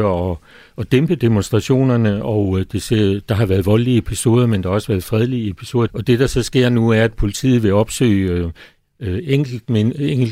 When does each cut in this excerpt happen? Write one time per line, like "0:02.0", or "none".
0:05.9